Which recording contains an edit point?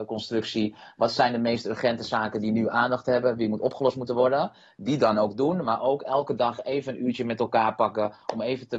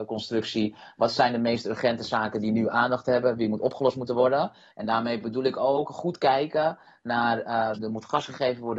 second; 2 cuts; at 4.7 s, 7.8 s

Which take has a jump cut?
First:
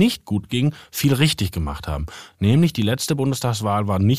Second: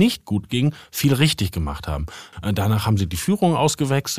second; 1 cut; at 2.3 s

